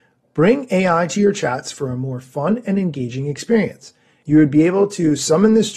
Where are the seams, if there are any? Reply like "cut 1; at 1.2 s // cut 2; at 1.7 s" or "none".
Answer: cut 1; at 4.2 s